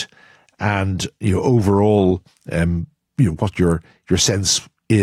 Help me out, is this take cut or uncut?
uncut